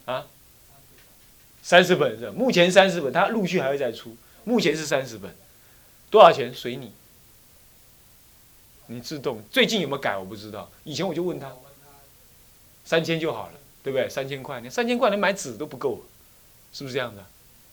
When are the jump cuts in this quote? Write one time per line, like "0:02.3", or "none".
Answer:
none